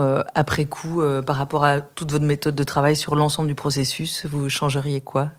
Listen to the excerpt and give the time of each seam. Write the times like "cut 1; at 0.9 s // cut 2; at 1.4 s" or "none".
none